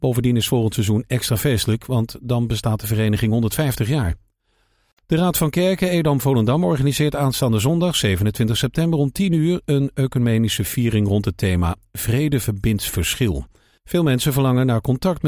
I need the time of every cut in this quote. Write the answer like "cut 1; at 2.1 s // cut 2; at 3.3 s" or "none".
none